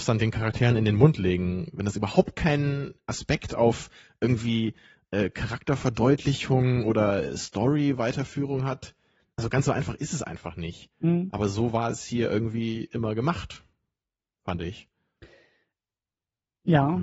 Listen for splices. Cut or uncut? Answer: uncut